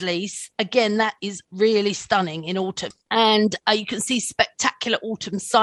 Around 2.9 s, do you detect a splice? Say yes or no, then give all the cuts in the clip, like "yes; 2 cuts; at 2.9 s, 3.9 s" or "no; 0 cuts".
yes; 2 cuts; at 1.4 s, 2.9 s